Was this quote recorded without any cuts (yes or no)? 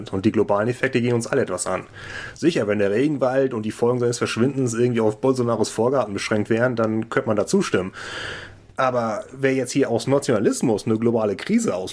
yes